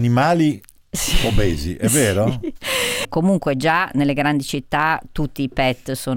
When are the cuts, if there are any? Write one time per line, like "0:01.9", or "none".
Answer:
0:03.0